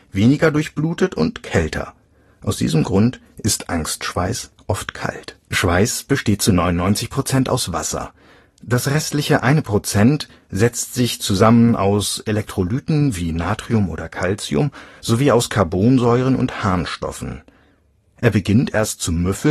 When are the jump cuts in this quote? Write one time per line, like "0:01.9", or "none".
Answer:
0:05.4
0:18.0